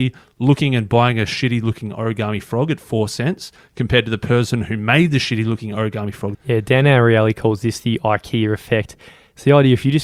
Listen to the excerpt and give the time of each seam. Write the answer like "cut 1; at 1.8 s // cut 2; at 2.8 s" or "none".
cut 1; at 6.3 s